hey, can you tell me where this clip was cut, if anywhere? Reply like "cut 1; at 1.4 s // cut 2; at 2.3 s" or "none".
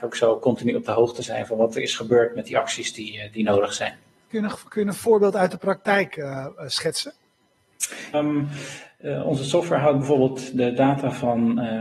cut 1; at 4.3 s // cut 2; at 8.1 s